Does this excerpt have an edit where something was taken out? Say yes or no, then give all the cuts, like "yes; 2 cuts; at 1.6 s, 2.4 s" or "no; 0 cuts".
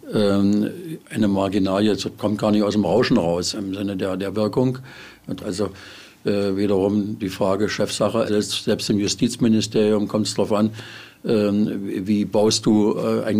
yes; 3 cuts; at 3.5 s, 5.4 s, 8.3 s